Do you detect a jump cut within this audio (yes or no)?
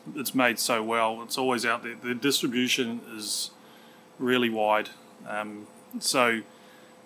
no